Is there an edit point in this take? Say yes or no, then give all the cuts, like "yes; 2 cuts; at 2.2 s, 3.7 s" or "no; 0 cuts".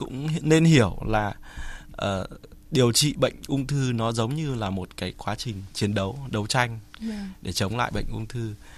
no; 0 cuts